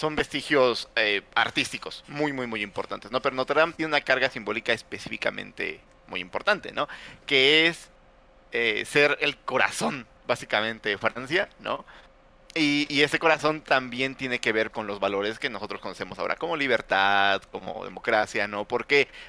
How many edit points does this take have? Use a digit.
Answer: 1